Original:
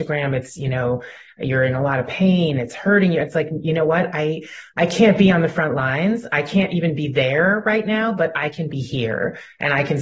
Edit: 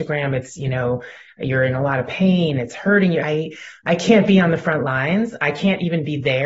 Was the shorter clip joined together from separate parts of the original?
yes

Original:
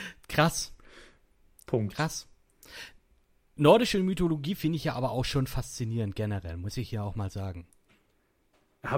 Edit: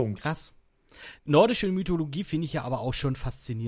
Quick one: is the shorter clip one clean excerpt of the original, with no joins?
no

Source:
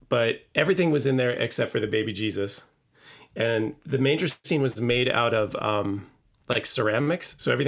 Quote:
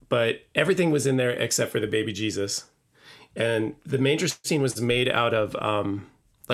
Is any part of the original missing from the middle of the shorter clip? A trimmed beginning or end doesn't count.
no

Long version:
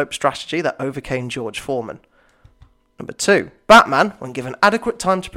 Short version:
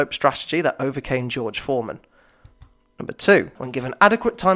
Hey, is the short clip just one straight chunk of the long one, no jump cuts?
no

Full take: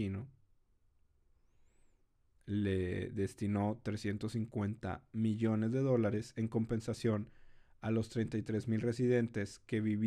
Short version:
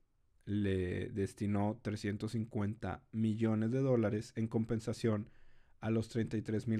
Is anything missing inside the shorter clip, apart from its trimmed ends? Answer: no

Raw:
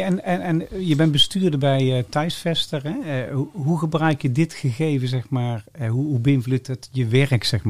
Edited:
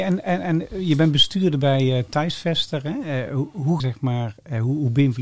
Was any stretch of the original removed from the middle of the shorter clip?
yes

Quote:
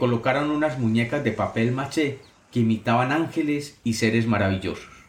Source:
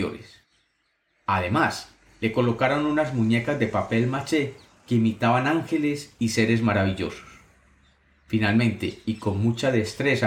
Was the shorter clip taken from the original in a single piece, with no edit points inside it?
yes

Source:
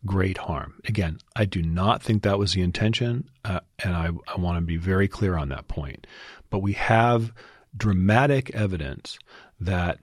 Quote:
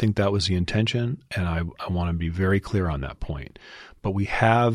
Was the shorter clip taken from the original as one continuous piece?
no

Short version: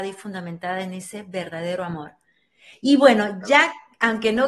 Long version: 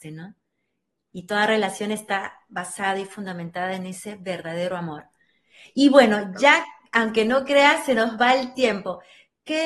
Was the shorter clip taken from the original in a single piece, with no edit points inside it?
yes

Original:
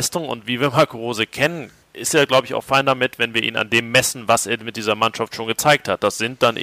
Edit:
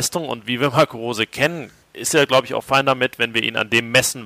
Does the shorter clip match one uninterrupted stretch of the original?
yes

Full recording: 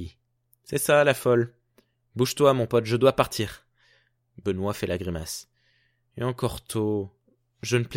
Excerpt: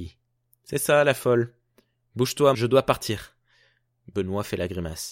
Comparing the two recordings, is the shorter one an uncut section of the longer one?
no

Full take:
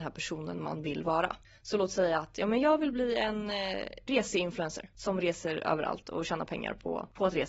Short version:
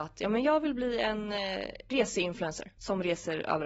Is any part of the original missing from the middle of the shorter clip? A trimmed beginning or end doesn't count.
no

